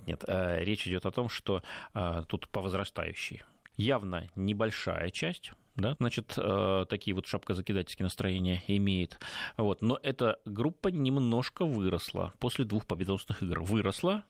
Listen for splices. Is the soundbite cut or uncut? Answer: cut